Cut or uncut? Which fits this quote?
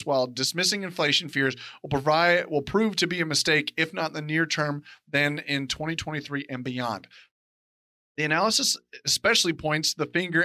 uncut